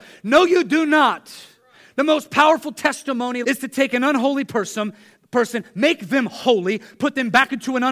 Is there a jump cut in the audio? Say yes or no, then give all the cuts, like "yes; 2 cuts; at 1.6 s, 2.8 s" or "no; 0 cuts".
yes; 1 cut; at 3.4 s